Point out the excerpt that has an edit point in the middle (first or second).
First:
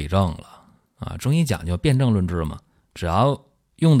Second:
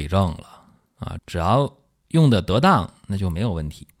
second